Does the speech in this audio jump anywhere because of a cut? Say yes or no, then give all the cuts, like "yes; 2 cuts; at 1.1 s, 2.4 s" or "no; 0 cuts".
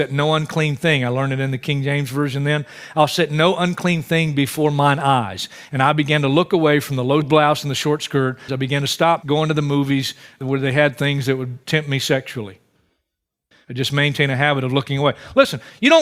yes; 2 cuts; at 8.5 s, 13.5 s